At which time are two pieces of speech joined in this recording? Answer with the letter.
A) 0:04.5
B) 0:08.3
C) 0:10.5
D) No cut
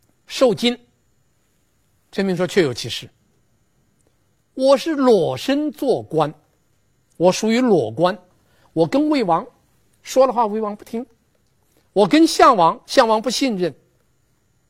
B